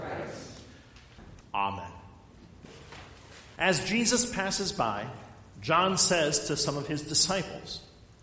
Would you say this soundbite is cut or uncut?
cut